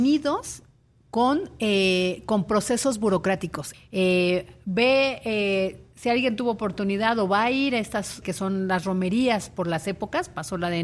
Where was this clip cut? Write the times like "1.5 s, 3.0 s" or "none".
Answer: 3.7 s, 8.2 s